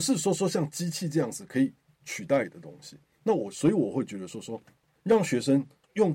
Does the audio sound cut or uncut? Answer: uncut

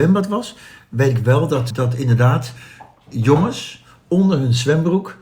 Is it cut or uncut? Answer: cut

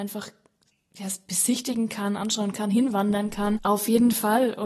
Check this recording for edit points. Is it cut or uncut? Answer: cut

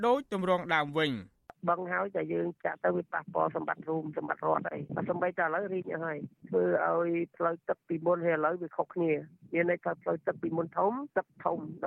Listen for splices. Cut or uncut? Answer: uncut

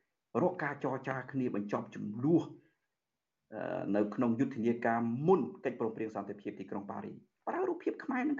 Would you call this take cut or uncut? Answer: uncut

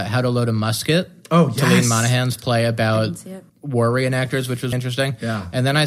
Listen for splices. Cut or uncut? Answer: cut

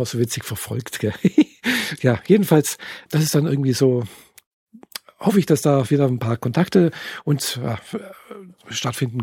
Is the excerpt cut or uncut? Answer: cut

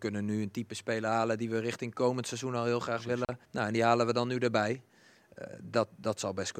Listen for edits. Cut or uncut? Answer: cut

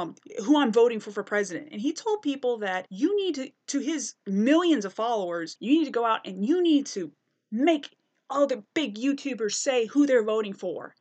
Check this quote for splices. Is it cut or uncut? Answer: uncut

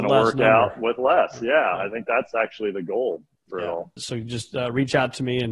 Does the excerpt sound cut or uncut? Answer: cut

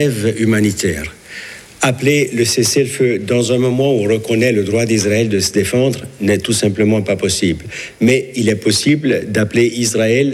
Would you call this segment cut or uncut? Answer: uncut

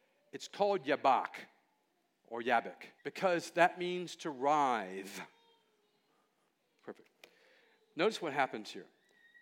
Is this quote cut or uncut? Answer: cut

